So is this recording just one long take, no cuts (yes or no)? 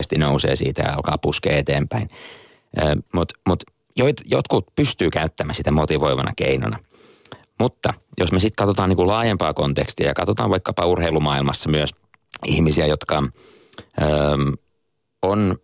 no